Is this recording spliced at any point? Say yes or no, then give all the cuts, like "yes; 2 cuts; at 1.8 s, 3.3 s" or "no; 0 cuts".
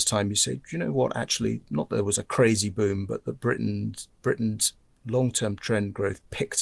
no; 0 cuts